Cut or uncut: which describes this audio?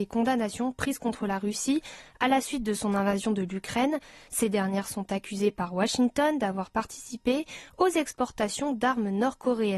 cut